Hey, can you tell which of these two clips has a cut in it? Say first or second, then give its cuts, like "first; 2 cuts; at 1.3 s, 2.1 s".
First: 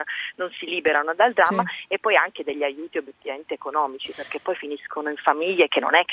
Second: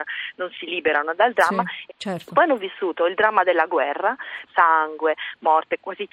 second; 2 cuts; at 1.9 s, 4.5 s